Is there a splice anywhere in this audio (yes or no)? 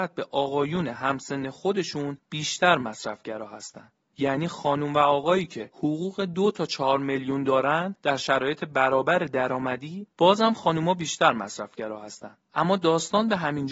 yes